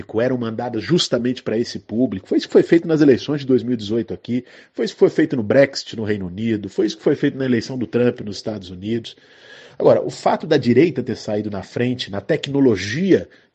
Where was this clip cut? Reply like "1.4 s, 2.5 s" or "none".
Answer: none